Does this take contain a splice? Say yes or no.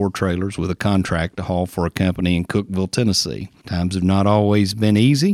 yes